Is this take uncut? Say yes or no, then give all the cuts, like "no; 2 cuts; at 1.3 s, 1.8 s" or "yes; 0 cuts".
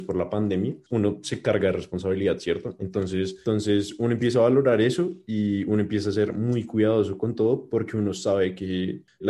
yes; 0 cuts